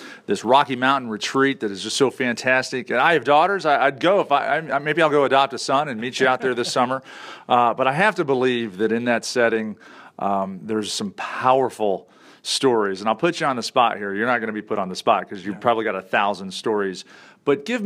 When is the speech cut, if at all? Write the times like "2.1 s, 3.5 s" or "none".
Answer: none

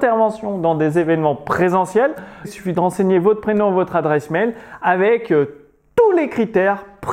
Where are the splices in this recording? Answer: 2.4 s

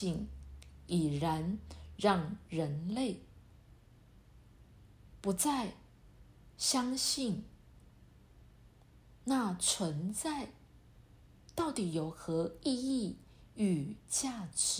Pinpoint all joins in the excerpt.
none

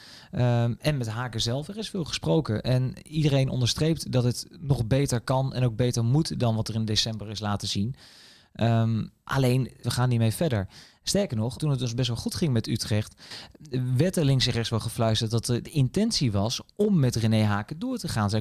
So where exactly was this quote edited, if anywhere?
9.8 s, 11.6 s

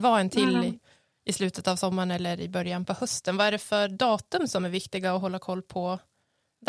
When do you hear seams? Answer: none

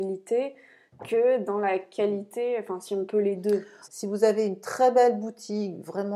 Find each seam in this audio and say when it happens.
3.9 s

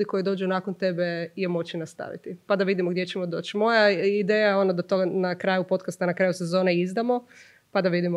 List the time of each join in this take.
none

